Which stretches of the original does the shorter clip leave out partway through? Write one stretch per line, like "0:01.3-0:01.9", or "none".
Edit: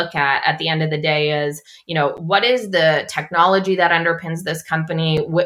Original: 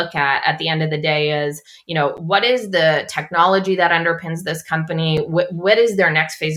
none

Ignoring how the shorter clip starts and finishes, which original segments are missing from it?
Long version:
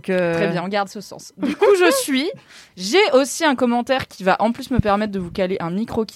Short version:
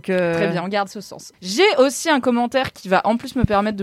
0:01.3-0:02.7

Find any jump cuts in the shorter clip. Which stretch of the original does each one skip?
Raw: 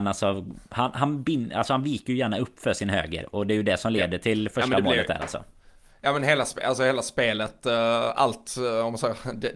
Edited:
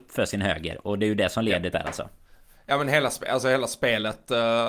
0:04.2-0:05.1

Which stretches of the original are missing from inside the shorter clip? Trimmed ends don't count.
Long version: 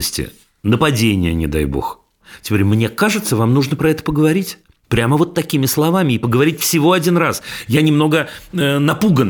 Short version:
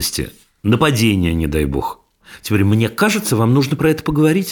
none

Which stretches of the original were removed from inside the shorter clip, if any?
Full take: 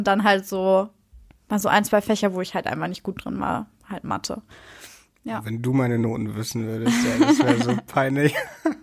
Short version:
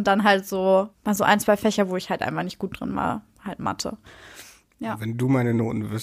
0:00.9-0:01.4

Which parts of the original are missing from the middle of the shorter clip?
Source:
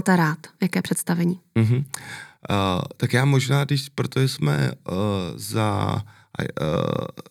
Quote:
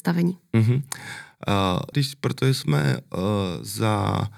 0:02.9-0:03.7

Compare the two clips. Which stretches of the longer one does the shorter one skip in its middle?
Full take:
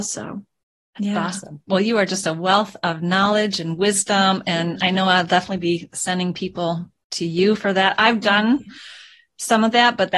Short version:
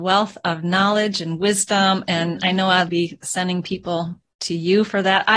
0:05.3-0:05.6

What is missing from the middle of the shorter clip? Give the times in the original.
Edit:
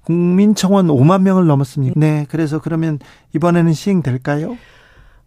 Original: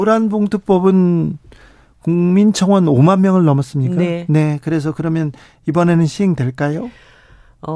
0:03.9-0:04.3

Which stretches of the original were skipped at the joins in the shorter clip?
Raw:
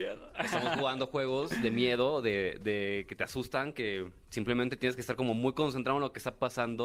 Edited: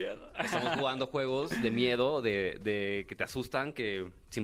none

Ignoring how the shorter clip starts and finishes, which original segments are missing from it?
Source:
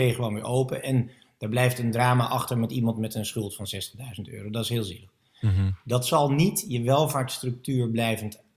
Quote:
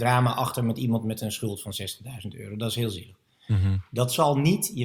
none

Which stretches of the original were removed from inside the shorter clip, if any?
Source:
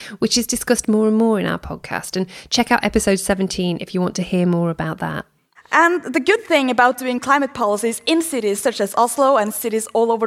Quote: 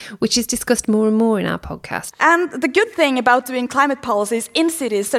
0:02.1-0:05.6

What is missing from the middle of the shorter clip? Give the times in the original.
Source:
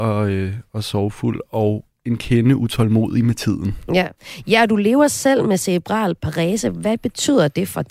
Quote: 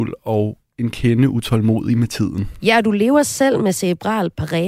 0:03.9-0:04.4

